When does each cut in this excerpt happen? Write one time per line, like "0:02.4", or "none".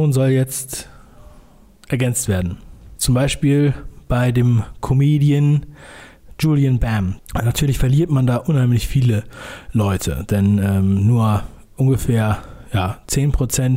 0:03.0
0:07.2